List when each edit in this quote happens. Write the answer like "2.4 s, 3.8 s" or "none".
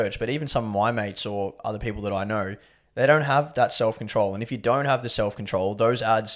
none